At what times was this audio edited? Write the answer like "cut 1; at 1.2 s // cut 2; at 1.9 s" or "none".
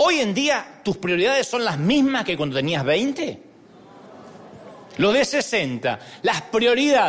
none